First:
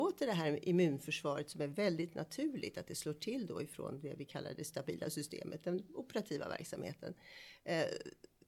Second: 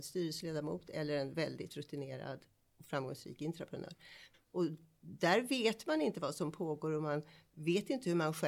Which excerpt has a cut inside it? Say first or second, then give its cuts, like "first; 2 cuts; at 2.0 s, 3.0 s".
second; 1 cut; at 4.3 s